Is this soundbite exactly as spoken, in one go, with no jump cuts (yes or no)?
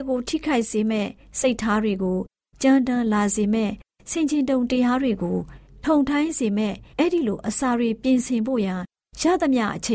no